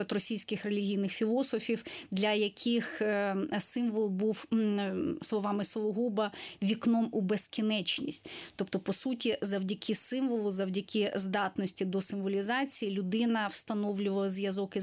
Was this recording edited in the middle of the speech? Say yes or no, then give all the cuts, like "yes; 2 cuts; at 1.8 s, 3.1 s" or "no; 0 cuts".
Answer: no; 0 cuts